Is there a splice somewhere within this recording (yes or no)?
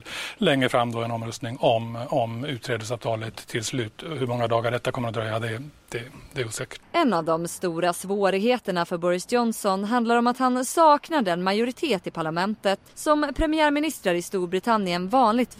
yes